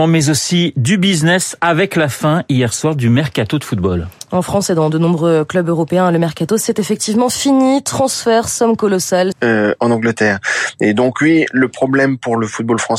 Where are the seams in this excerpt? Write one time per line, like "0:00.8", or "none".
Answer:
0:09.3